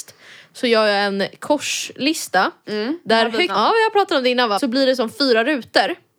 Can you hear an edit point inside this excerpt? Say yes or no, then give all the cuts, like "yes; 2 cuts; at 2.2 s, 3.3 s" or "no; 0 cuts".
yes; 2 cuts; at 3.5 s, 4.6 s